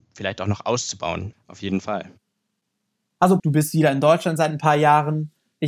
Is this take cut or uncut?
cut